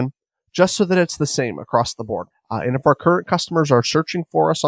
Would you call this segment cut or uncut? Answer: cut